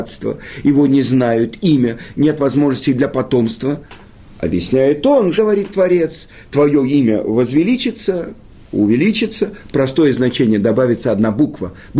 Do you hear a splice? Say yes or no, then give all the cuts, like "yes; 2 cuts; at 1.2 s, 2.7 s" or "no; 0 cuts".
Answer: yes; 1 cut; at 5.4 s